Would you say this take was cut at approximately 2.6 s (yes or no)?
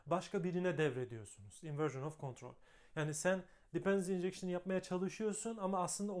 no